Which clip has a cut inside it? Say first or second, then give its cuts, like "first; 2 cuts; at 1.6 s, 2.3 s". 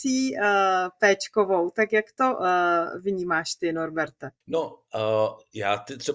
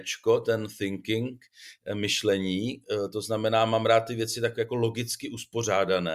first; 1 cut; at 4.4 s